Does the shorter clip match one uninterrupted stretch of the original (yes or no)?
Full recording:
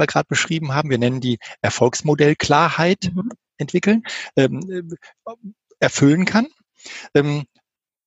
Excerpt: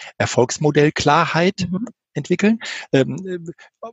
yes